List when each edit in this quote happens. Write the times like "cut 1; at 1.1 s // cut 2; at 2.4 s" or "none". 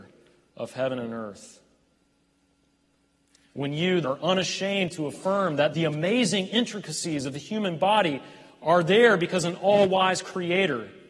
cut 1; at 4.0 s // cut 2; at 5.7 s